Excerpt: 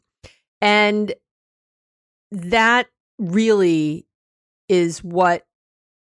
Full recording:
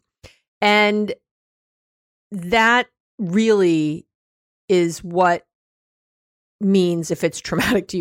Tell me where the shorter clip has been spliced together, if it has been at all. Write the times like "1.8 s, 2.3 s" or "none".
none